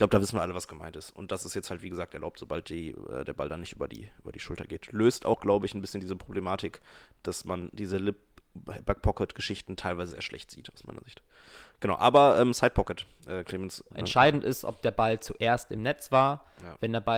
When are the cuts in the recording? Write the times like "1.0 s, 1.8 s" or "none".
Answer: 10.1 s, 13.9 s